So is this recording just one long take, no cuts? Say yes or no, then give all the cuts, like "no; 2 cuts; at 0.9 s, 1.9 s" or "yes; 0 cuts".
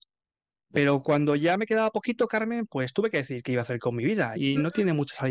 no; 1 cut; at 4.4 s